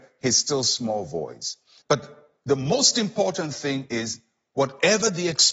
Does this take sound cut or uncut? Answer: cut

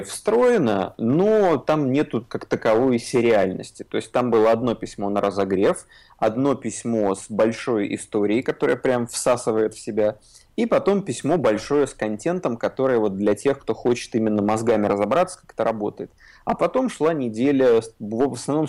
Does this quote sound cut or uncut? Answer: uncut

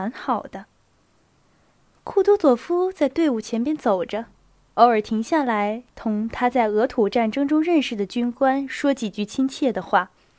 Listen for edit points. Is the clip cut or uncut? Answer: uncut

